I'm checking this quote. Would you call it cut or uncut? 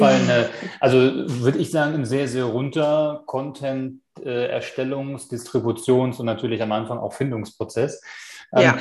uncut